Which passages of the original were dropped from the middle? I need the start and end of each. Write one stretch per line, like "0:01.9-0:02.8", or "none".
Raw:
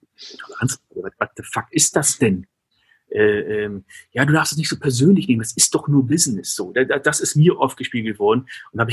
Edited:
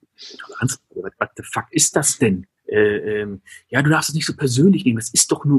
0:02.6-0:03.0

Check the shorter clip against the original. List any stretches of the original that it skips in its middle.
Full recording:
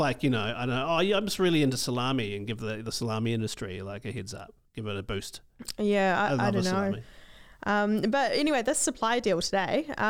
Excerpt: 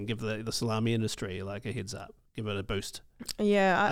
none

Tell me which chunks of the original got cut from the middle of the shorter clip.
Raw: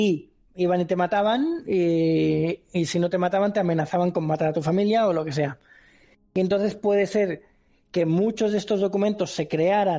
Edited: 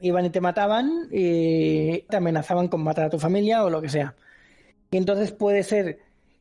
0:02.6-0:03.5

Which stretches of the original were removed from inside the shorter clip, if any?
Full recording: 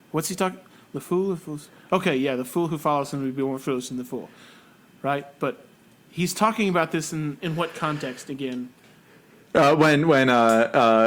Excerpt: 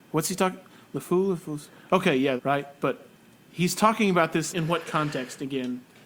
0:02.4-0:04.9
0:07.1-0:07.4

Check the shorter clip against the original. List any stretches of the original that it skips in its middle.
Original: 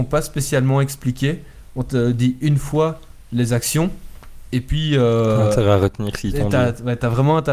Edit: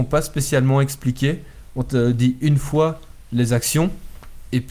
none

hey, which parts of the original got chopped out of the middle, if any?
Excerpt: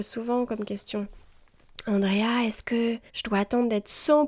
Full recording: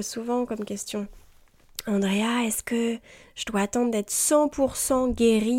0:03.1-0:03.3

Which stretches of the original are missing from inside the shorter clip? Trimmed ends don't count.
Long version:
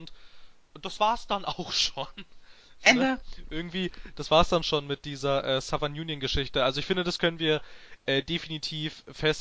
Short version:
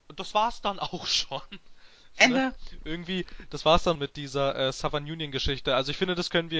0:04.6-0:04.8

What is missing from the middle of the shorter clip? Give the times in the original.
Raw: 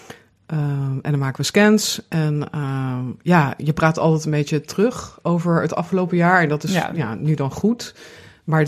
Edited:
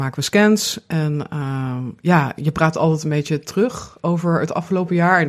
none

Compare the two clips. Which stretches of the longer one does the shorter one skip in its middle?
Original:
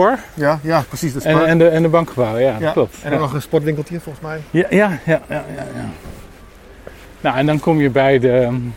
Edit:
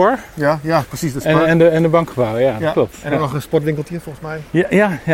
none

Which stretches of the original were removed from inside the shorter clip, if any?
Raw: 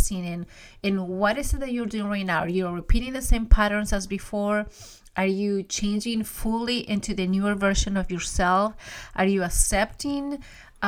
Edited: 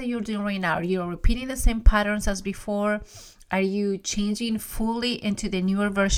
none

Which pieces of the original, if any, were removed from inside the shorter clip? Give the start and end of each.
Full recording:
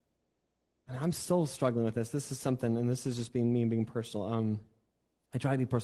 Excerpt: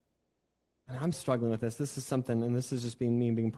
0:01.1-0:01.5

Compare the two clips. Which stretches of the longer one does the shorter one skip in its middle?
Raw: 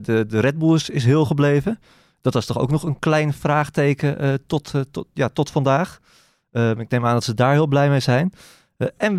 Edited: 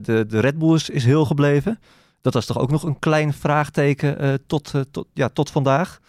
none

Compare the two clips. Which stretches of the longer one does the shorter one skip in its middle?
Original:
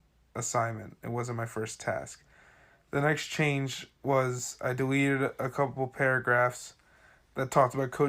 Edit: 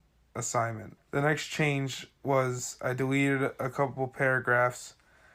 0:01.0-0:02.8

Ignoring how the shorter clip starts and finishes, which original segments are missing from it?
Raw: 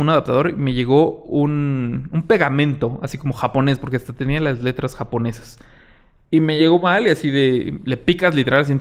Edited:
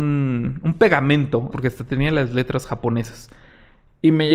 0:03.0-0:03.8

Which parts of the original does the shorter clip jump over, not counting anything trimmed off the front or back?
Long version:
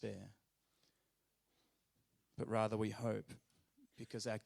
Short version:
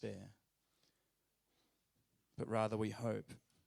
none

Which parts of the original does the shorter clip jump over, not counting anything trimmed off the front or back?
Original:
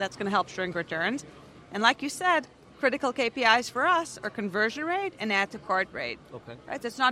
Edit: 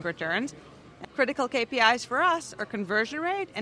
0:01.8-0:02.7

